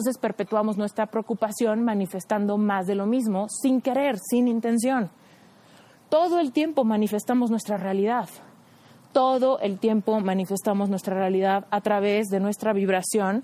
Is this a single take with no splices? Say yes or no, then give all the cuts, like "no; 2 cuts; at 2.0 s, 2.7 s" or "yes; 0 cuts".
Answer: yes; 0 cuts